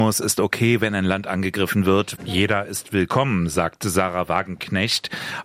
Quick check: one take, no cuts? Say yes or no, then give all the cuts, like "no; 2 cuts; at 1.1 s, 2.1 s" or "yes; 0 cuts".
no; 1 cut; at 2.2 s